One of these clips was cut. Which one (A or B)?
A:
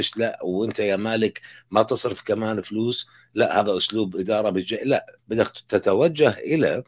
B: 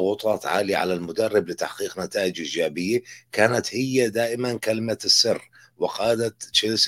A